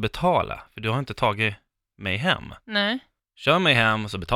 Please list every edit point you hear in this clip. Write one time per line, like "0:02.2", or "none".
none